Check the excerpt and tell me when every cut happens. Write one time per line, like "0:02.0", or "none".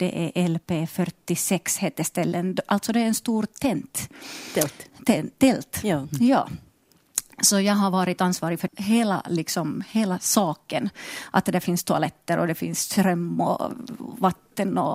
0:08.7

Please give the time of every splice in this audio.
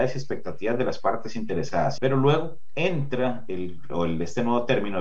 0:02.0
0:03.9

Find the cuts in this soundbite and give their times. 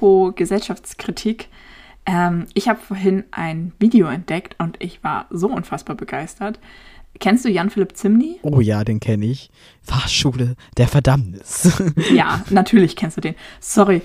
none

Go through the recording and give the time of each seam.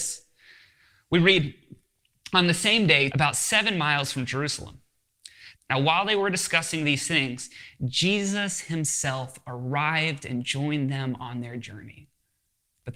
0:03.1
0:05.5

